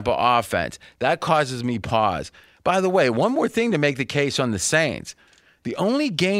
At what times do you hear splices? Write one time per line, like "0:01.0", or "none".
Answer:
none